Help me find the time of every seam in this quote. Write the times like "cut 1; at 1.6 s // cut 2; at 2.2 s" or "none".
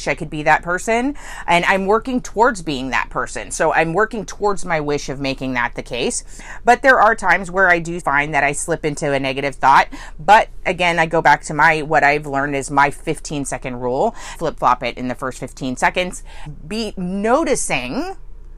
cut 1; at 8.0 s // cut 2; at 14.3 s // cut 3; at 16.5 s